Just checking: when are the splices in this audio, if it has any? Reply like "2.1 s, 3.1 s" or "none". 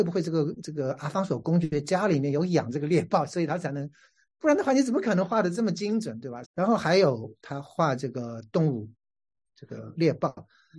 6.4 s